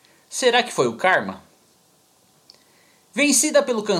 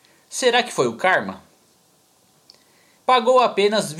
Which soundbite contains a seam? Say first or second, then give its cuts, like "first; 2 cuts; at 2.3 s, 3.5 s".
second; 1 cut; at 3.0 s